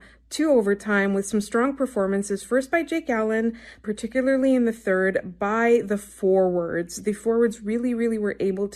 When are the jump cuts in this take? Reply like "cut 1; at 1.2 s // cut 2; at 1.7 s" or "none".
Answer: cut 1; at 3.8 s